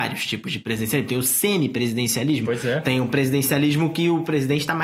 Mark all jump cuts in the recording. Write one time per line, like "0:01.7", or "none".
none